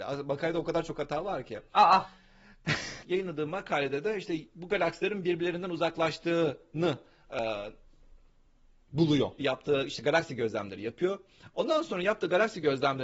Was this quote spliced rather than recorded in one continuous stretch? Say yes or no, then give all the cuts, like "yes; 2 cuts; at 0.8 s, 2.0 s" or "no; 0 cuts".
yes; 2 cuts; at 3.0 s, 9.4 s